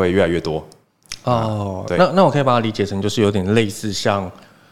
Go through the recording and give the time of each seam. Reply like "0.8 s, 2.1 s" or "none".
none